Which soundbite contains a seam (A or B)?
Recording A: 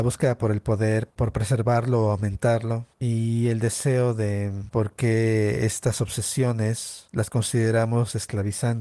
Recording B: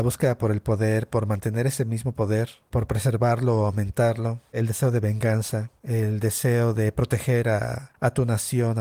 A